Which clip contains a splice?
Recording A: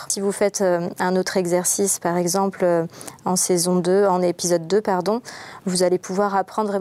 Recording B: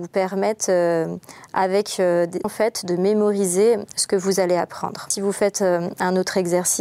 B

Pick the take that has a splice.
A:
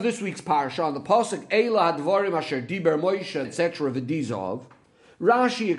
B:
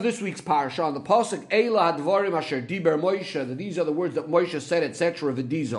A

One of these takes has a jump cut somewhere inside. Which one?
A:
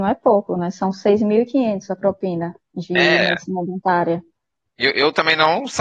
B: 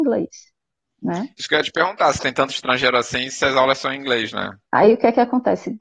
B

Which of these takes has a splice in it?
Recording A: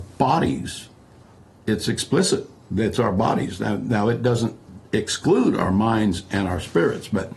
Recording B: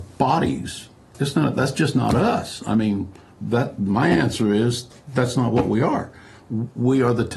B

